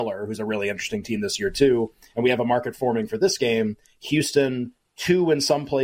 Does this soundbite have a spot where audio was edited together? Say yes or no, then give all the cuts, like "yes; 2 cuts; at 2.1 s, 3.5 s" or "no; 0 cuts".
no; 0 cuts